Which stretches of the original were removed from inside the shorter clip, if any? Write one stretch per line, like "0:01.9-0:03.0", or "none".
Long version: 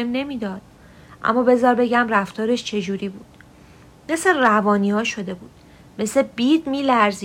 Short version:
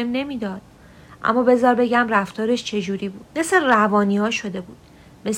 0:03.3-0:04.0